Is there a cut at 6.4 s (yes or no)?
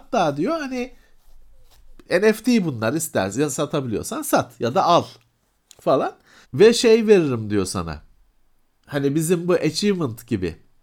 yes